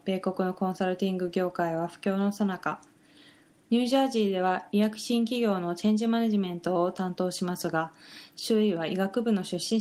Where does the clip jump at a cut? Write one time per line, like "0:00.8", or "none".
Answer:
0:03.6